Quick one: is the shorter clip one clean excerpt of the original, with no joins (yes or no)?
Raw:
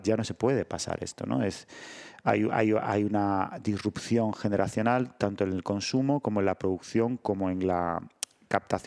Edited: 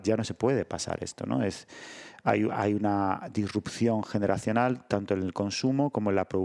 no